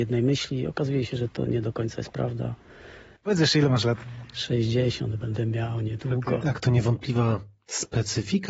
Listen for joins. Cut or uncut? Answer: cut